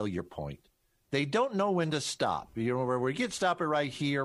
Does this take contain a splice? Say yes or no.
no